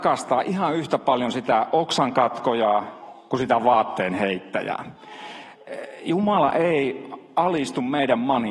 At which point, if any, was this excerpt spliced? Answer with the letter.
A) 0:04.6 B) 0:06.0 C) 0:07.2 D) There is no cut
D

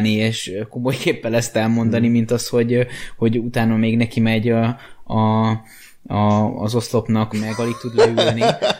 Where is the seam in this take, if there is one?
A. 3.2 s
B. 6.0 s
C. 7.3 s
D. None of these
C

